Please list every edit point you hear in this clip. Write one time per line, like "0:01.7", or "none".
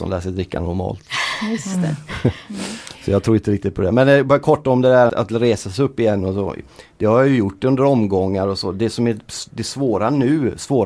0:05.1

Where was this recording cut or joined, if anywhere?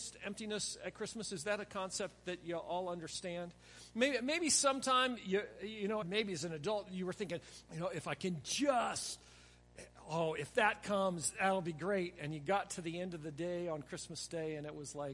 0:06.0
0:07.7

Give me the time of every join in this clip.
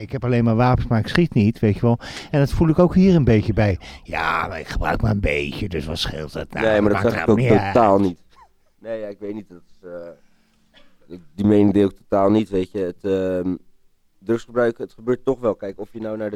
none

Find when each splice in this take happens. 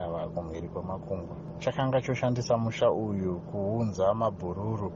none

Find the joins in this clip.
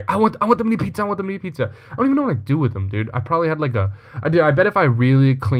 none

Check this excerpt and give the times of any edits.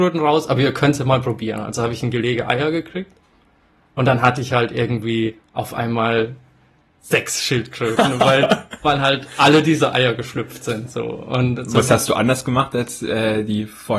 none

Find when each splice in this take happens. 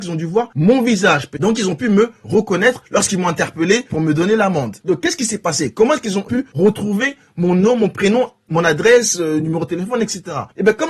0:04.8

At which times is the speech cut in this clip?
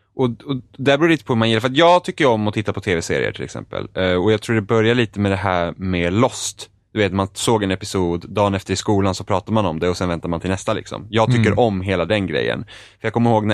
none

